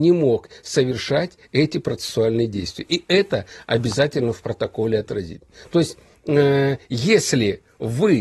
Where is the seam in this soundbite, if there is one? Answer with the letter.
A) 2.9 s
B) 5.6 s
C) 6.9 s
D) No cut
D